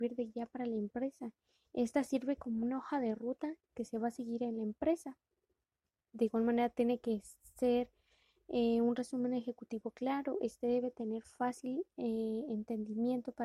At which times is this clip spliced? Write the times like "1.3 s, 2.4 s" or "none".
none